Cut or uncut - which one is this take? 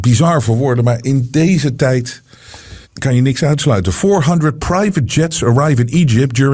cut